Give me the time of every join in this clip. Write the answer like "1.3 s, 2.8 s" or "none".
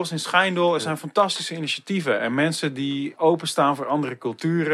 3.2 s

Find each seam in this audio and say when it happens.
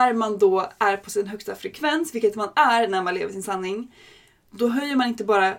none

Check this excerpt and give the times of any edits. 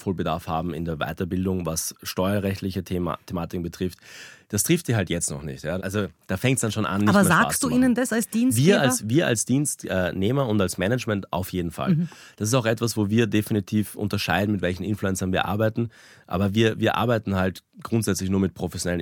5.8 s

